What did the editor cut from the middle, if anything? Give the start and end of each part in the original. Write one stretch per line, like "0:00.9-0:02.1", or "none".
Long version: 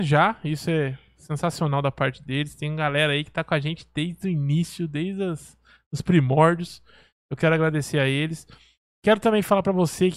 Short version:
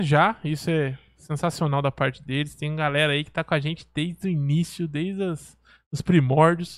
none